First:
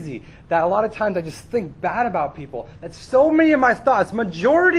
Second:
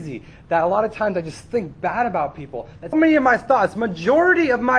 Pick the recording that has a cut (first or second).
second